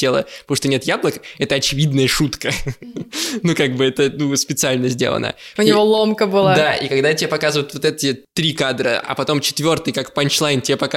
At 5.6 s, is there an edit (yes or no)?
yes